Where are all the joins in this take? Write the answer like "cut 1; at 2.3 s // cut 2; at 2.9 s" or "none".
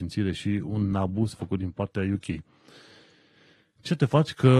none

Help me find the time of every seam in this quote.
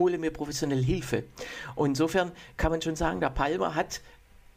none

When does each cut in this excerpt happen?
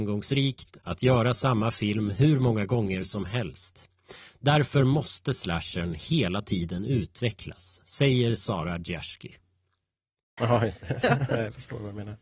cut 1; at 10.4 s

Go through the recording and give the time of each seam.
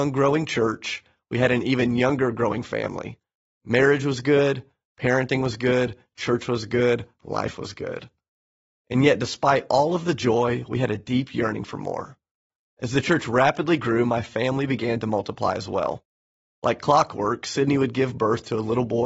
cut 1; at 12.6 s

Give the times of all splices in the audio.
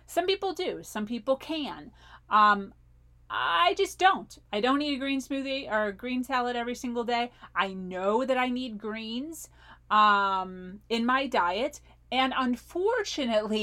none

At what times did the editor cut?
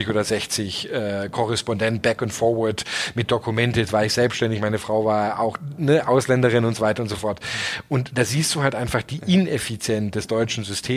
none

